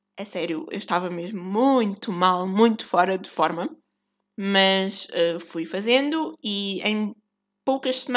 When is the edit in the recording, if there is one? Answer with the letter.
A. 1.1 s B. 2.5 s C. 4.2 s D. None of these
D